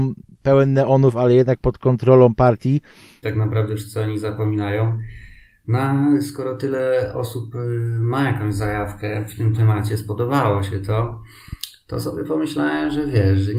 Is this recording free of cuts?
no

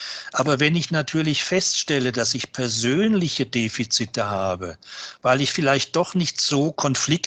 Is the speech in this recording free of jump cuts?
yes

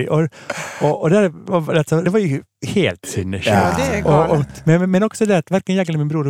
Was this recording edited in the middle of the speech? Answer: yes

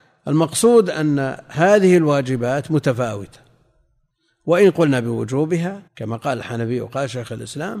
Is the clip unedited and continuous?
no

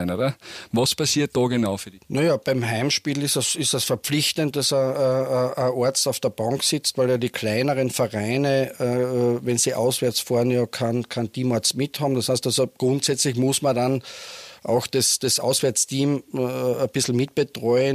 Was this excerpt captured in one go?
yes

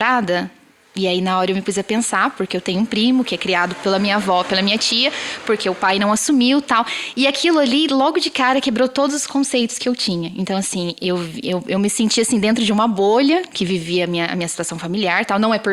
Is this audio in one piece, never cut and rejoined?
yes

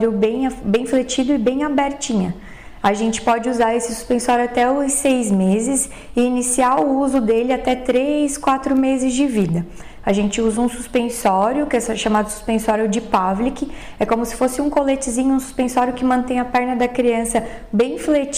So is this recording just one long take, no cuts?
no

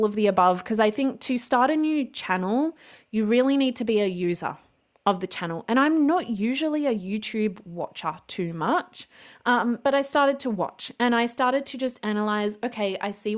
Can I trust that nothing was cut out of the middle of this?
yes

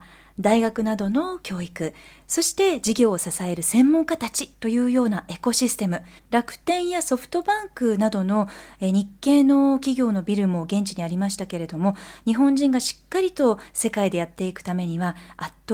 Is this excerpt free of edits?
no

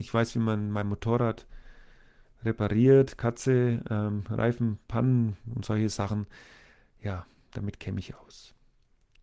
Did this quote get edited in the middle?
no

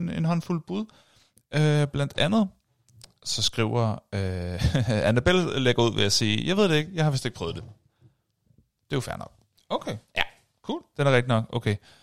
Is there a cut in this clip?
yes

